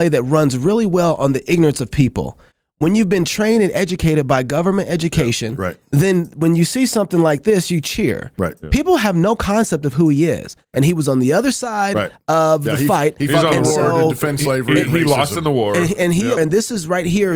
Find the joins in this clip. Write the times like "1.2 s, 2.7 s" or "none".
10.7 s, 16.4 s